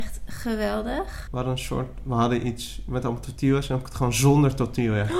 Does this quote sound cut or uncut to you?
cut